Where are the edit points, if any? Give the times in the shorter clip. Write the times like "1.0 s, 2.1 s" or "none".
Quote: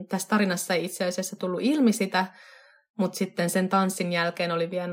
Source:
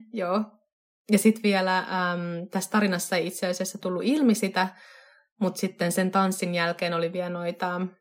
none